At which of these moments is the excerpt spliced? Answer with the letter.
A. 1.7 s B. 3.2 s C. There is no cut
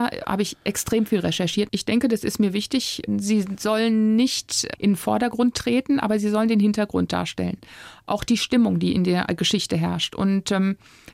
A